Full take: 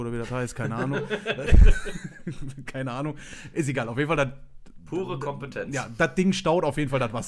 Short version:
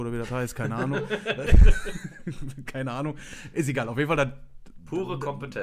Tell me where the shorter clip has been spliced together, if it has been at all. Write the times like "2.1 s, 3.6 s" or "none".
none